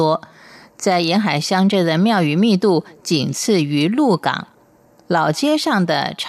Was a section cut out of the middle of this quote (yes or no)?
no